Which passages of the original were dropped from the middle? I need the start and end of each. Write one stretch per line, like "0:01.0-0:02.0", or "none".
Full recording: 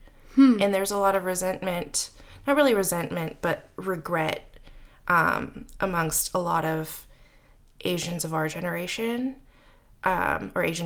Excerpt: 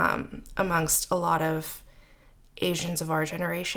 none